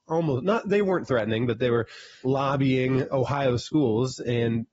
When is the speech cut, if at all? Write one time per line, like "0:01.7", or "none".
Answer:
0:02.2